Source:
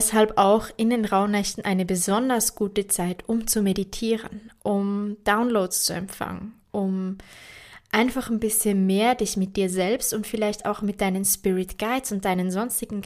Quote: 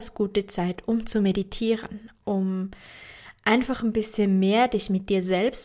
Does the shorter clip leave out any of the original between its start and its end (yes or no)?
yes